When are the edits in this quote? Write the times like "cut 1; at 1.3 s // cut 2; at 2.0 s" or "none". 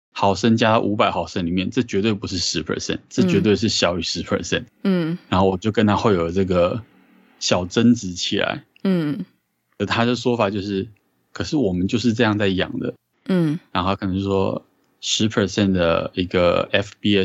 cut 1; at 13.1 s